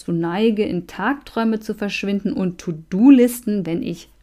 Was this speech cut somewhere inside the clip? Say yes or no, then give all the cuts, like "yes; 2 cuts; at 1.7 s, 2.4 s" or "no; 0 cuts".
no; 0 cuts